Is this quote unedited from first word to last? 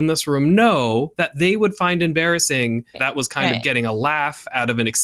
no; 1 cut; at 2.9 s

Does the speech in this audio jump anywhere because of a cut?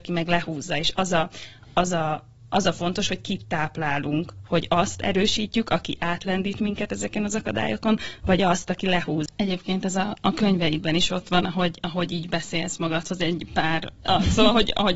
yes; 2 cuts; at 9.3 s, 14.1 s

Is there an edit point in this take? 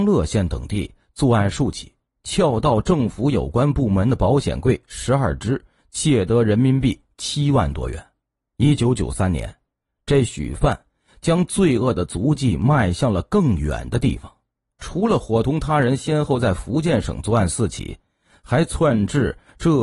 no; 0 cuts

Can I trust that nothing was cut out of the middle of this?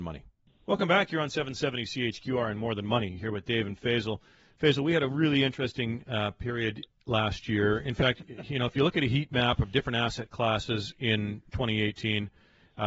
yes; 0 cuts

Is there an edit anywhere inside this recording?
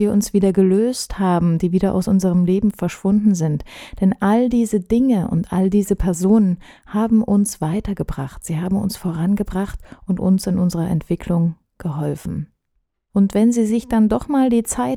yes; 1 cut; at 13.1 s

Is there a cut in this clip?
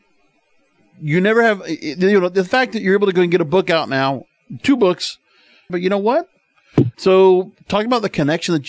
yes; 2 cuts; at 5.7 s, 6.9 s

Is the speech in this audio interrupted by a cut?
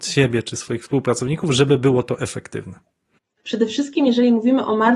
yes; 1 cut; at 3.4 s

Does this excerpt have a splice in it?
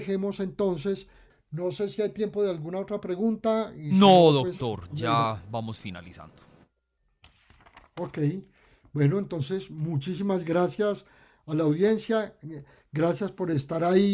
yes; 1 cut; at 1.3 s

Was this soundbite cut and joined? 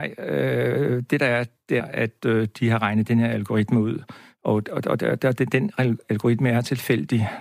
yes; 1 cut; at 1.8 s

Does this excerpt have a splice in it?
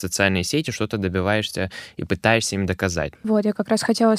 yes; 1 cut; at 3.1 s

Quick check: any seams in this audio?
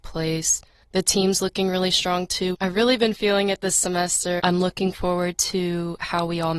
yes; 2 cuts; at 2.5 s, 4.4 s

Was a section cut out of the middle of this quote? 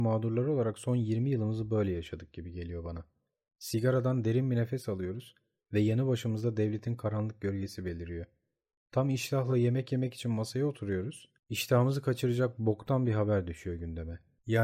no; 0 cuts

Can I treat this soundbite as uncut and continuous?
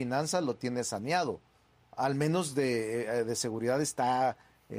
yes; 0 cuts

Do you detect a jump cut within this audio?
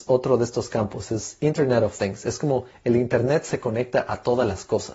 no; 0 cuts

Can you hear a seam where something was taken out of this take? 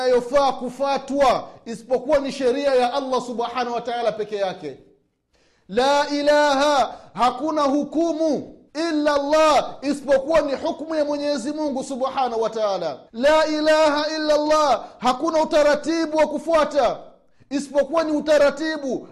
yes; 2 cuts; at 8.7 s, 13.1 s

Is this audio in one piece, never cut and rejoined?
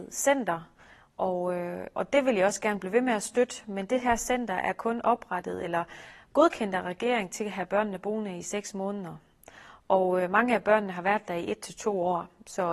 yes; 0 cuts

